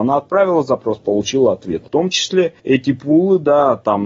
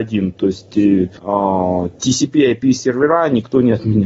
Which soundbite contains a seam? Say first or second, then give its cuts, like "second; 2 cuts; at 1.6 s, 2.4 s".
first; 1 cut; at 1.9 s